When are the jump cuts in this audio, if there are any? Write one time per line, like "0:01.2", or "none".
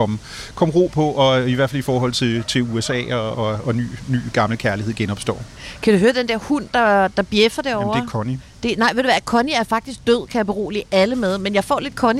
0:03.3